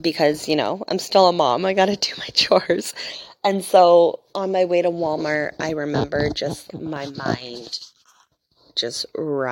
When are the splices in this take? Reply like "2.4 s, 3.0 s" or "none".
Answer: 4.3 s, 6.7 s